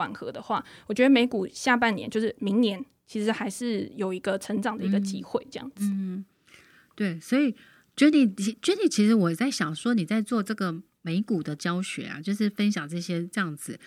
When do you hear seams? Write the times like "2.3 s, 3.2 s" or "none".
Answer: none